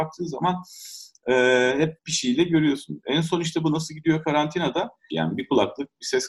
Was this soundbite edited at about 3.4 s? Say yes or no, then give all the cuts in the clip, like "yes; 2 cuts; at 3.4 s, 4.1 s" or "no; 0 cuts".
no; 2 cuts; at 2.0 s, 5.1 s